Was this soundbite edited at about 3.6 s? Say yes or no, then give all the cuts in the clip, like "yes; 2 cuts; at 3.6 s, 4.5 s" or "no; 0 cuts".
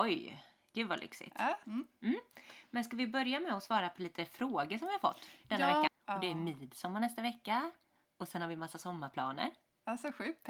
no; 3 cuts; at 1.6 s, 5.9 s, 8.0 s